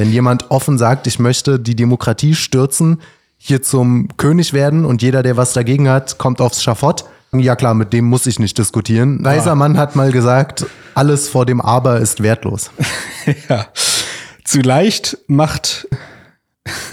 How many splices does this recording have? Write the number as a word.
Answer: three